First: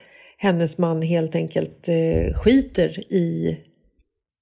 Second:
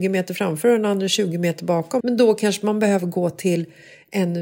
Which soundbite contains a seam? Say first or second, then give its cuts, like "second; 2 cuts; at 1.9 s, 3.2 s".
second; 1 cut; at 2.0 s